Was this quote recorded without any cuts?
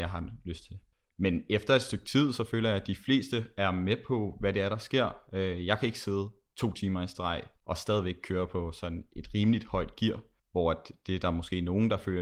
yes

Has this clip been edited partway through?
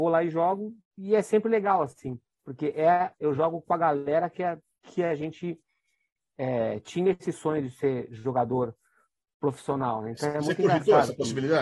no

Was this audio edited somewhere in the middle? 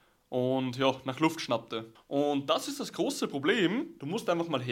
yes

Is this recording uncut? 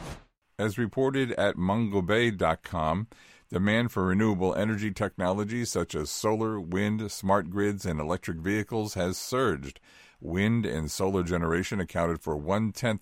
yes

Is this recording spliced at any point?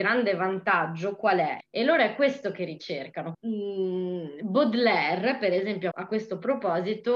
yes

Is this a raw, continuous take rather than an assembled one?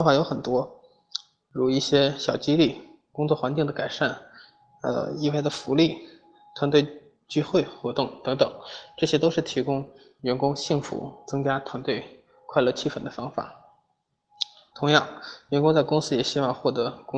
no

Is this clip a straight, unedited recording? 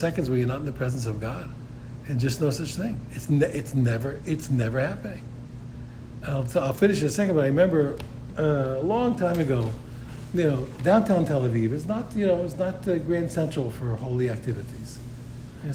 yes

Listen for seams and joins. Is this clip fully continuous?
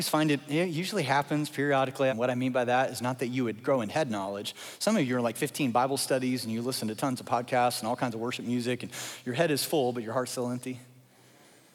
no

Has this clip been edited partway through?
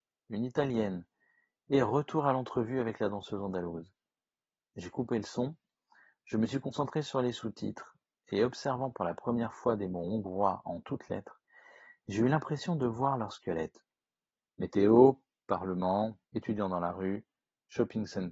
yes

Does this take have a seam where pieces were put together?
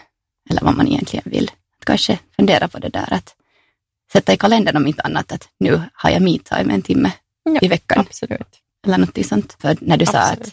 yes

